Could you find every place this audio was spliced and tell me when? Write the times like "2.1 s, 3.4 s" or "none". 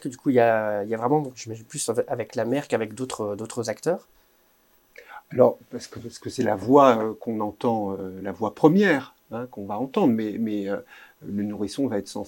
1.3 s